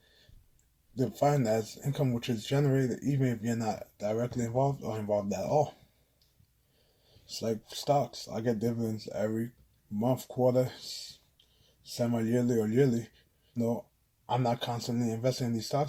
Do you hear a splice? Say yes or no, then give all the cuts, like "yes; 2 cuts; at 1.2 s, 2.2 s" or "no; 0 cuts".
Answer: yes; 1 cut; at 13.6 s